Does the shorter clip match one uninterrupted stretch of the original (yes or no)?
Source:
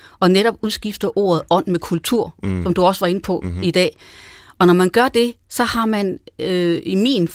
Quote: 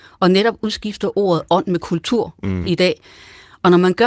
no